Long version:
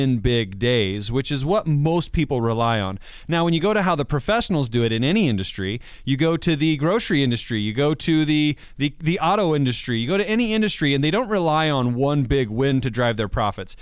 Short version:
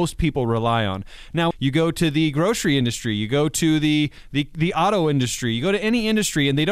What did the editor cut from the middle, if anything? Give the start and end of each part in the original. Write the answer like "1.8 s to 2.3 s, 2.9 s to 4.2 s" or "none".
3.5 s to 6.0 s